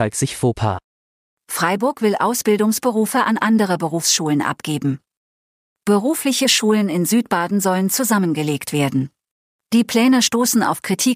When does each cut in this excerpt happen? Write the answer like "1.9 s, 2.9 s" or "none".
9.5 s

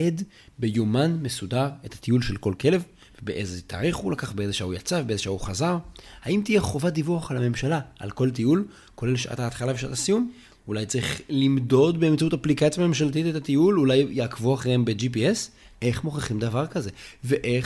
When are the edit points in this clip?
none

